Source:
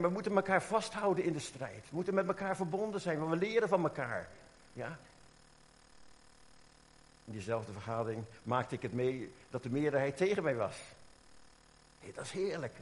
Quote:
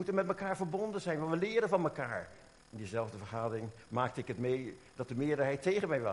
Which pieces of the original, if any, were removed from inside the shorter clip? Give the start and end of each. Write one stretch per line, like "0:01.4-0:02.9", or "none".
0:04.6-0:07.2